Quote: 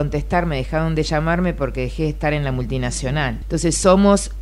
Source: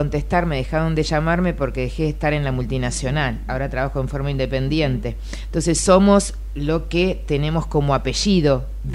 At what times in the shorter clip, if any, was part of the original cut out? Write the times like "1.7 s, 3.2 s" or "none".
3.4 s